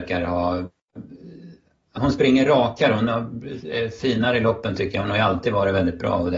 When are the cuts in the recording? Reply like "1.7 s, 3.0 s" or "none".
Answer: 2.0 s